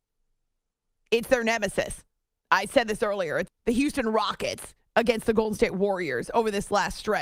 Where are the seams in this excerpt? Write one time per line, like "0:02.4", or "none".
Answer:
0:03.5